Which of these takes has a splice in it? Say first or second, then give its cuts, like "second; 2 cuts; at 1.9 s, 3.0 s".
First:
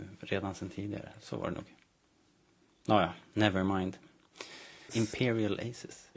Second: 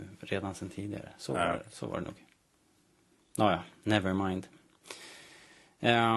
first; 2 cuts; at 1.1 s, 4.9 s